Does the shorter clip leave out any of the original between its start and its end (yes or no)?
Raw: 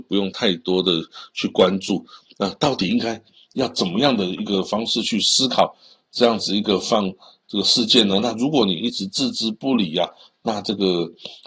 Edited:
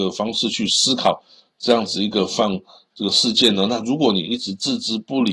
no